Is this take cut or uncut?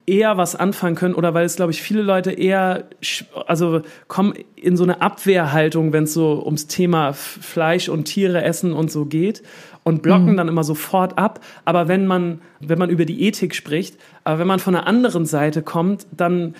cut